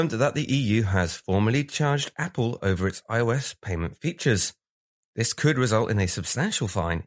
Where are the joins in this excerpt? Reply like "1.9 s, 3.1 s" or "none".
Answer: none